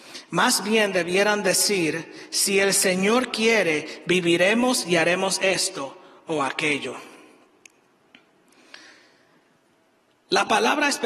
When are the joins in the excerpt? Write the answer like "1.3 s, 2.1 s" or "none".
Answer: none